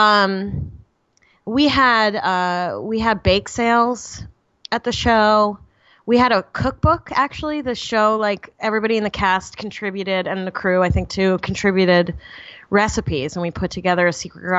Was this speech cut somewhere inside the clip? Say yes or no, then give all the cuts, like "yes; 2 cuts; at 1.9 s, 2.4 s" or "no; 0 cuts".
no; 0 cuts